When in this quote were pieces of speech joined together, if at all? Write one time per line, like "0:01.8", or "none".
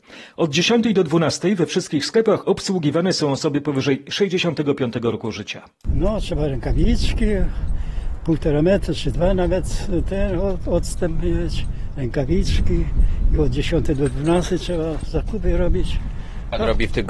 none